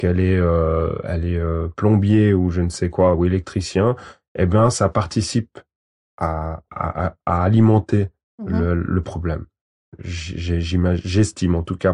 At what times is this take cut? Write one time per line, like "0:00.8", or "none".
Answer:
none

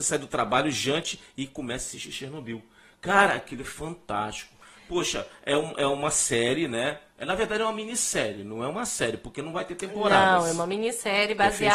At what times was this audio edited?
none

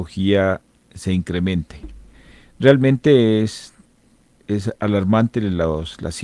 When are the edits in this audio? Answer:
none

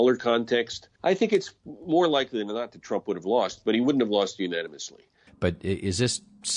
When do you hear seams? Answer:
0:01.0
0:05.3

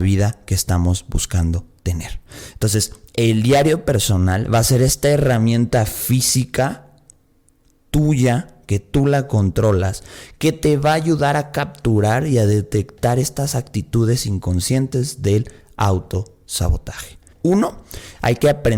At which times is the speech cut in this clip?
0:17.3

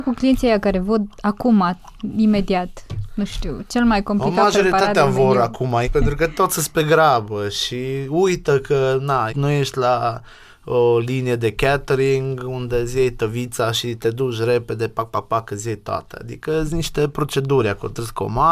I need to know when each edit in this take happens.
0:05.8
0:09.3

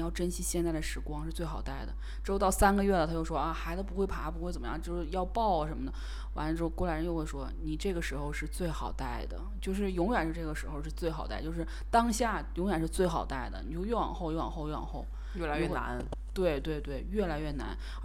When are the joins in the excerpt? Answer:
none

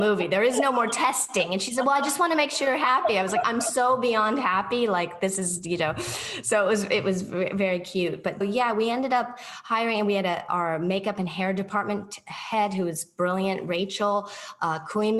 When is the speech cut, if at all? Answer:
0:08.4
0:10.5

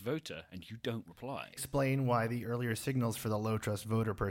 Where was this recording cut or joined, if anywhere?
0:01.6

